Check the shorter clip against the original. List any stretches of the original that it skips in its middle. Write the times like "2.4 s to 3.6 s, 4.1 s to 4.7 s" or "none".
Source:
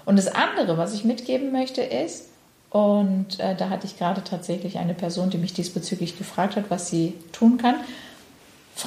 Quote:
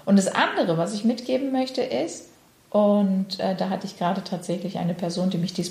none